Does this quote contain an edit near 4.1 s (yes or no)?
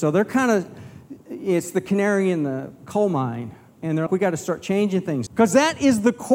yes